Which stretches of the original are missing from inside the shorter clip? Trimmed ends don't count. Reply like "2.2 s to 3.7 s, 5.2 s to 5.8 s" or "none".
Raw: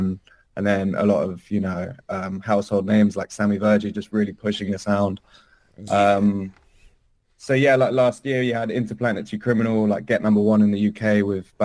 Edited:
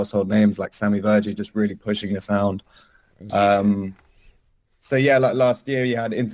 none